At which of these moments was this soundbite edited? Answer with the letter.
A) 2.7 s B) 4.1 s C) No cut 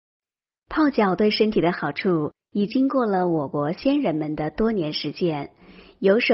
A